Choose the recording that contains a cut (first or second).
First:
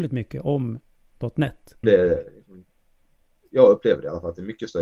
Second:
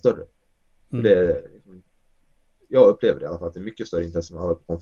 first